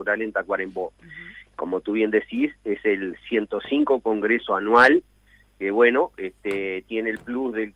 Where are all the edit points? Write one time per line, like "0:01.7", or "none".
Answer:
none